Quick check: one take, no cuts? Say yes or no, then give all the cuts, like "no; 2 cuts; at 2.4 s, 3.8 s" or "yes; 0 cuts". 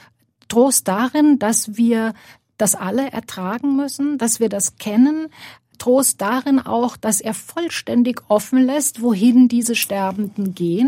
yes; 0 cuts